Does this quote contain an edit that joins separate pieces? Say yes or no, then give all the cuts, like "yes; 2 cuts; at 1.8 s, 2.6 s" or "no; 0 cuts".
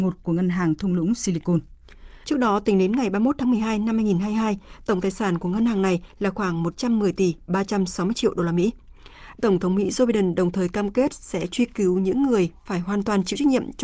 yes; 2 cuts; at 2.2 s, 9.4 s